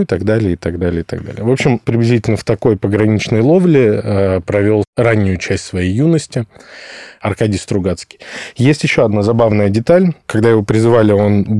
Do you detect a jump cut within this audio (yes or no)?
yes